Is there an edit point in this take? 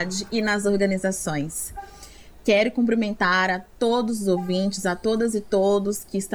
no; 0 cuts

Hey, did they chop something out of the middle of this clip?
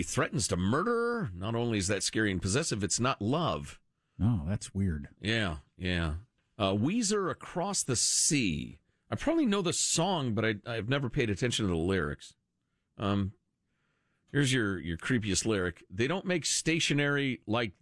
no; 0 cuts

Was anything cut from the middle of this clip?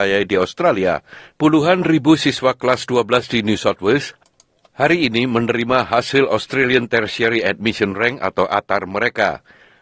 yes; 1 cut; at 1.3 s

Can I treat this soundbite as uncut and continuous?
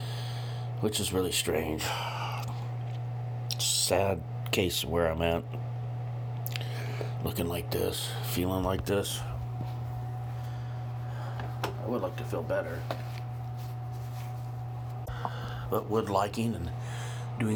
yes; 0 cuts

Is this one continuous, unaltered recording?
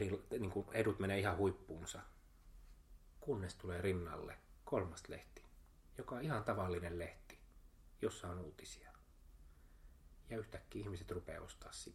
yes; 0 cuts

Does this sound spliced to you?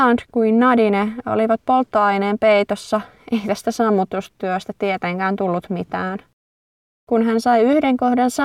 no; 0 cuts

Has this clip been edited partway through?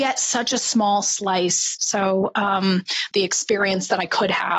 yes; 2 cuts; at 1.8 s, 3.1 s

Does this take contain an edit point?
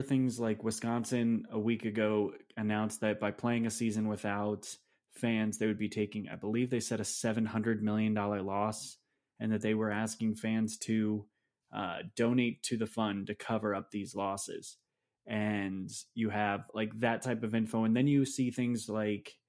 no; 0 cuts

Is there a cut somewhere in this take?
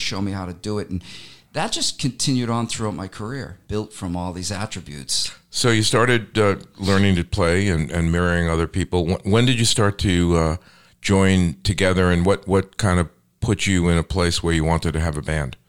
yes; 1 cut; at 3.7 s

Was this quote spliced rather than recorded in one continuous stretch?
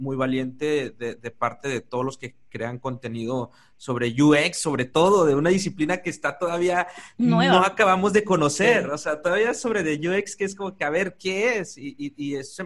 no; 0 cuts

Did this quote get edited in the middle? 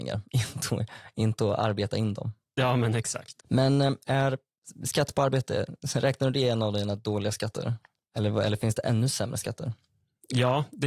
no; 0 cuts

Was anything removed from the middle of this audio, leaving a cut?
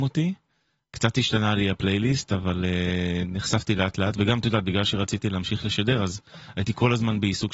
no; 0 cuts

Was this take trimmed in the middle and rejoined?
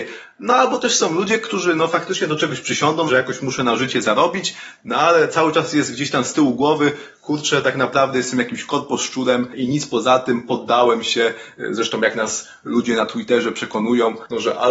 yes; 1 cut; at 3.1 s

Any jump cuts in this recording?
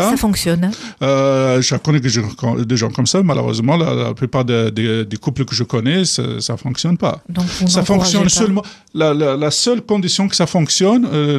no; 0 cuts

